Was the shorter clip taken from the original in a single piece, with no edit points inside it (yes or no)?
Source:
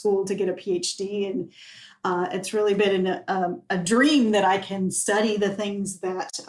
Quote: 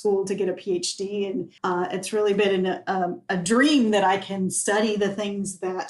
no